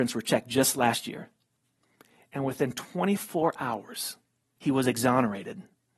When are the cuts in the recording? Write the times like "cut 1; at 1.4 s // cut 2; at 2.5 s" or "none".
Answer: cut 1; at 4.6 s